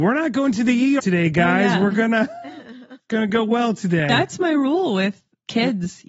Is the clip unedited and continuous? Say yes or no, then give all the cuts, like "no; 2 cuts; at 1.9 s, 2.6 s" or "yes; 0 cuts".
no; 1 cut; at 1.0 s